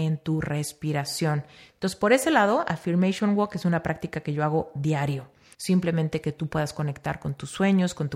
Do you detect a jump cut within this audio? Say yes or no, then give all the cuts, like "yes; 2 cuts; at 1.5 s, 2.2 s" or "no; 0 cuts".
yes; 2 cuts; at 1.7 s, 5.5 s